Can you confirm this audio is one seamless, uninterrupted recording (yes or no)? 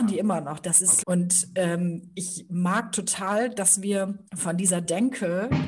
no